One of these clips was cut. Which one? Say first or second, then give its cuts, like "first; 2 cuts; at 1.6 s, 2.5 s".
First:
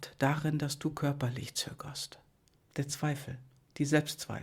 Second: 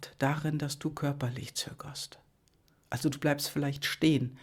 first; 1 cut; at 2.6 s